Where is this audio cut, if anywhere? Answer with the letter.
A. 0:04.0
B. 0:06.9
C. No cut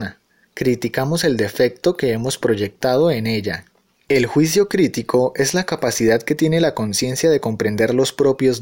A